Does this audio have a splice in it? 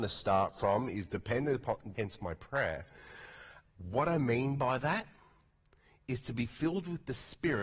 yes; 2 cuts; at 1.9 s, 3.7 s

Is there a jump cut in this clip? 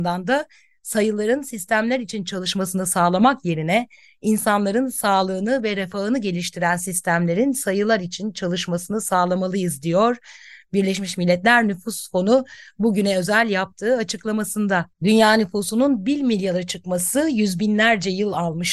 yes; 1 cut; at 14.9 s

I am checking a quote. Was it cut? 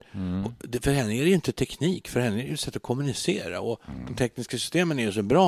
no; 0 cuts

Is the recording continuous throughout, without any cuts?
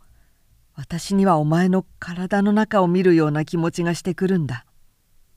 yes; 0 cuts

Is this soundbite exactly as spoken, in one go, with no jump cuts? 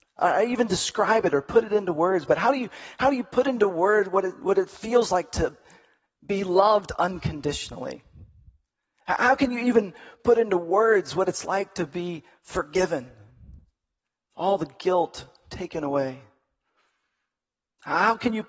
yes; 0 cuts

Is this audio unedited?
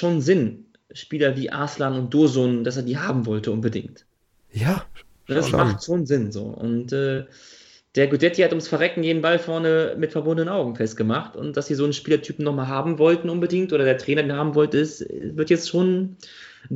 yes; 0 cuts

